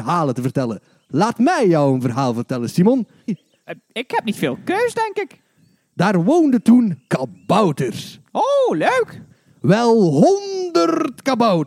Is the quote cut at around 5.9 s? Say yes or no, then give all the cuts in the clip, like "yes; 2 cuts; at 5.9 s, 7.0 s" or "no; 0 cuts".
yes; 2 cuts; at 3.3 s, 5.9 s